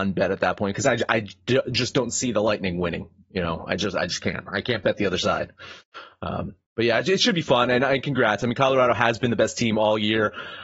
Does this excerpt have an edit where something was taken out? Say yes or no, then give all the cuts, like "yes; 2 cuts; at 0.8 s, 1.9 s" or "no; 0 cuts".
no; 0 cuts